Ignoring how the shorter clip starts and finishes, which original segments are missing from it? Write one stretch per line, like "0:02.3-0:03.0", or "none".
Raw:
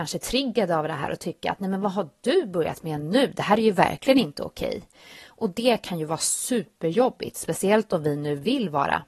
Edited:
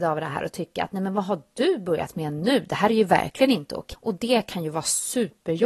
0:04.6-0:05.3